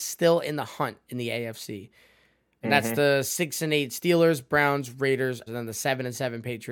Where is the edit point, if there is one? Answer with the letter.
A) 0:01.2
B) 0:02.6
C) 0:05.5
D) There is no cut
C